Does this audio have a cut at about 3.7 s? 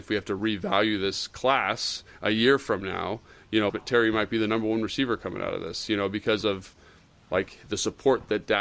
yes; 1 cut; at 3.7 s

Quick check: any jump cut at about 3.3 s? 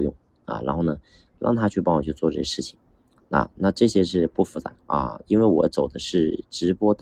no; 1 cut; at 4.7 s

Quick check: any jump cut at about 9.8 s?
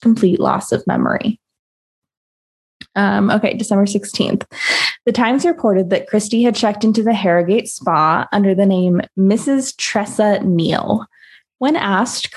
no; 0 cuts

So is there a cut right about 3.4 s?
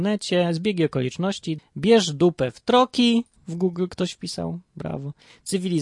yes; 2 cuts; at 1.6 s, 3.4 s

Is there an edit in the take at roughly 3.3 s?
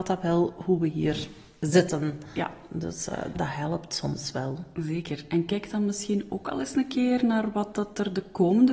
yes; 1 cut; at 3.3 s

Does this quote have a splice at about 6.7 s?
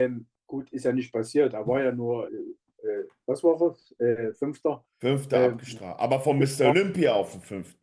no; 1 cut; at 2.3 s

